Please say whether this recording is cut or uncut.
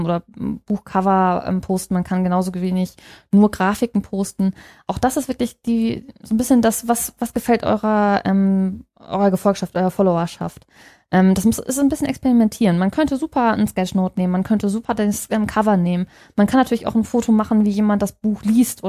uncut